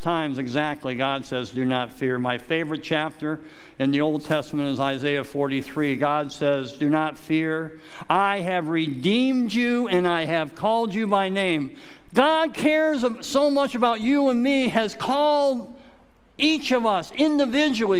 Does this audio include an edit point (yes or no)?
yes